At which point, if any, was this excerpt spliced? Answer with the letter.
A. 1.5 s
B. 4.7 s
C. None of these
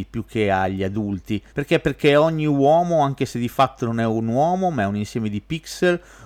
A